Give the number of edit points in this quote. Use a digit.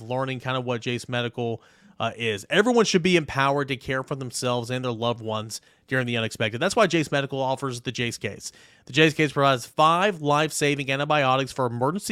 0